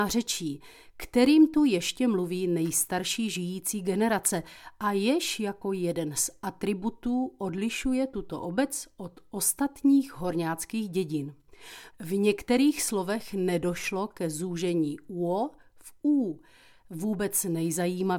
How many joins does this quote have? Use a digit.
2